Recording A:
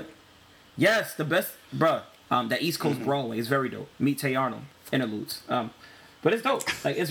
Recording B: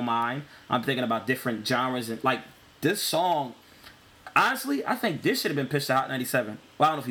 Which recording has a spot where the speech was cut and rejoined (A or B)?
A